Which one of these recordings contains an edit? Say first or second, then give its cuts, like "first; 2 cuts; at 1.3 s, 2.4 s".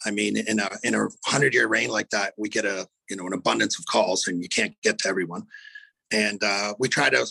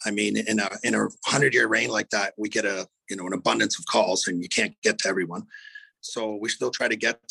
second; 1 cut; at 6.0 s